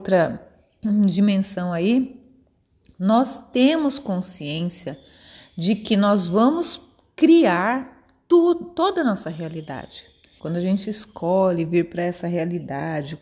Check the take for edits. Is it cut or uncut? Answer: cut